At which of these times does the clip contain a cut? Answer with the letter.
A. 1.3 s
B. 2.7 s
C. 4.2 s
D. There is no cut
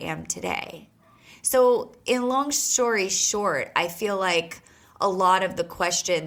D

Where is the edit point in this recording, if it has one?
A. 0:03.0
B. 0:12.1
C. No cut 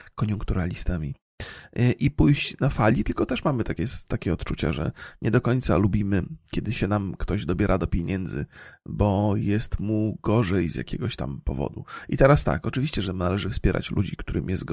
C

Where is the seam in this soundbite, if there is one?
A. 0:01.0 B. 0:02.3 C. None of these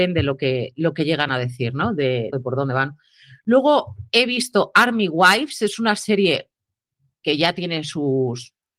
B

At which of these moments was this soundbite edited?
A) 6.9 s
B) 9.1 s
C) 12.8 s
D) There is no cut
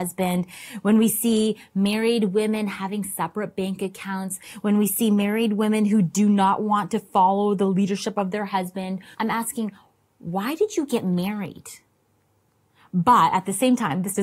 B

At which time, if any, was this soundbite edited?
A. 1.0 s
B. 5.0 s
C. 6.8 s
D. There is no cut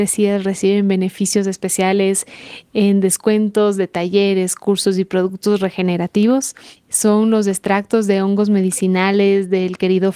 C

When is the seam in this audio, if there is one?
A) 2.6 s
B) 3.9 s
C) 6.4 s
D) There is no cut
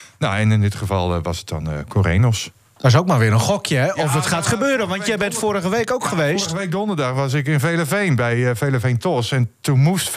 D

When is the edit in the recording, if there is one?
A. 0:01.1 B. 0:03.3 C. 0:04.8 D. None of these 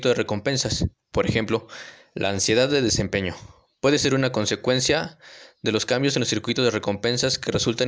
A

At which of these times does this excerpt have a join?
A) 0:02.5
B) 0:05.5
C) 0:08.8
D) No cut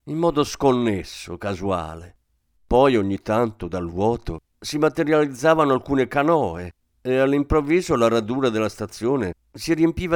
A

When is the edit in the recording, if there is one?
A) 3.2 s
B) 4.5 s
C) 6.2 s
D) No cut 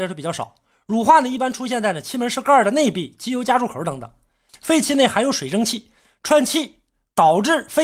B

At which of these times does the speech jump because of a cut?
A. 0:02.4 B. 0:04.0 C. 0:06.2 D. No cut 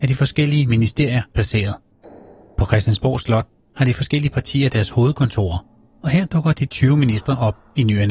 D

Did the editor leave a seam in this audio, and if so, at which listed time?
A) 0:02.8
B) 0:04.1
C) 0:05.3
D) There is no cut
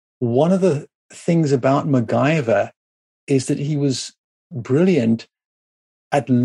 D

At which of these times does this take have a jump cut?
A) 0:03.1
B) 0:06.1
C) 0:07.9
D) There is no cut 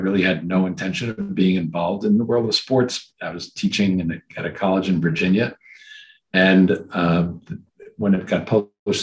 D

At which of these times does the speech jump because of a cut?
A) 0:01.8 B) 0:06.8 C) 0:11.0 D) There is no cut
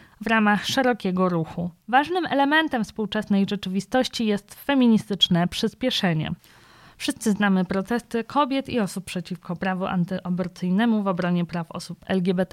A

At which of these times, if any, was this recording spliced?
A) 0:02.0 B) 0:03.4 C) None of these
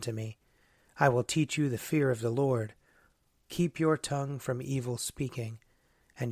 B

